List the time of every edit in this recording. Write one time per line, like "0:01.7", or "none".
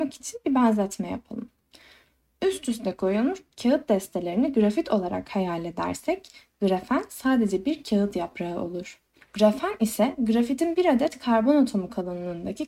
0:09.2